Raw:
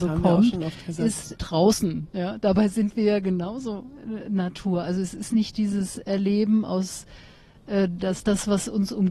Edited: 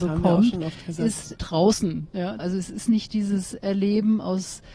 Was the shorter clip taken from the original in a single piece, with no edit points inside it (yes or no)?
no